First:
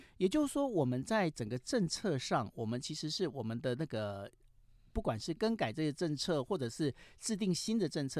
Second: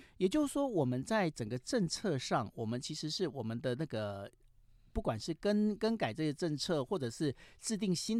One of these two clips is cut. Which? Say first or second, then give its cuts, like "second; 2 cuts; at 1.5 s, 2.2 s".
first; 1 cut; at 5.4 s